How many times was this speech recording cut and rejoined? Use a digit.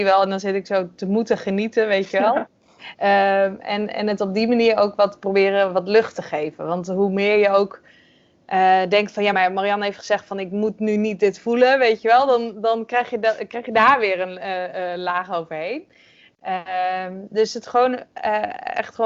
0